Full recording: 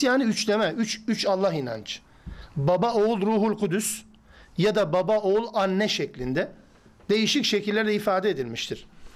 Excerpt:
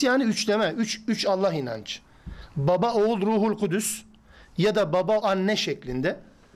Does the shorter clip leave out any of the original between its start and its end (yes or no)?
yes